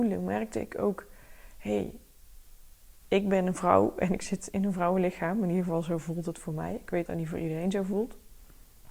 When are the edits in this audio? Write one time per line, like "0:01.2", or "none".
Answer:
0:07.1